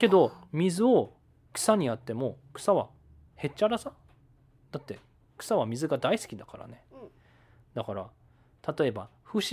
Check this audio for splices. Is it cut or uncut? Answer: uncut